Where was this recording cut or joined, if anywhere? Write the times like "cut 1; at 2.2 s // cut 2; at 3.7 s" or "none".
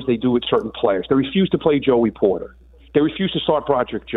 none